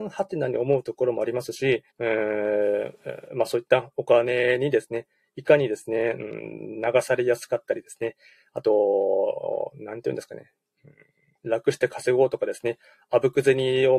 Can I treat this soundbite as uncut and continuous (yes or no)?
no